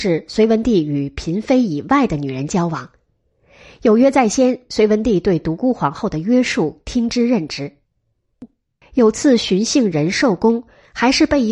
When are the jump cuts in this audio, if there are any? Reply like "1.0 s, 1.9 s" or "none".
8.8 s